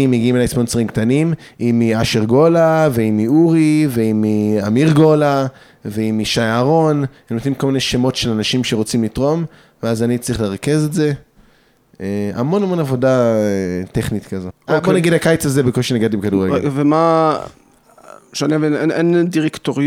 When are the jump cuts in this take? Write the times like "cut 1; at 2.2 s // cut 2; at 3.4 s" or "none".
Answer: cut 1; at 14.5 s